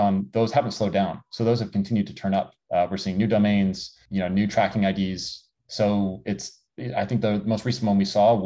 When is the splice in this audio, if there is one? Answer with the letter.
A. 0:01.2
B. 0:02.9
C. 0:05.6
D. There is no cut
D